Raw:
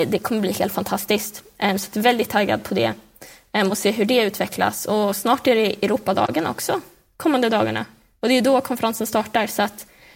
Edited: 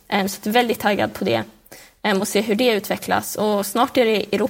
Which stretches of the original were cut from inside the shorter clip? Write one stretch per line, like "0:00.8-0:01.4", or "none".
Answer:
none